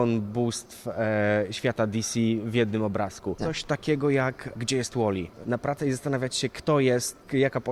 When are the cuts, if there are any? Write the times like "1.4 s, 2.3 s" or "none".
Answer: 3.4 s, 5.4 s